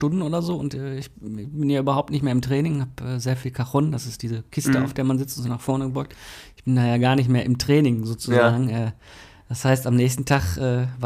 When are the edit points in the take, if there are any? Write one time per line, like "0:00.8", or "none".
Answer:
none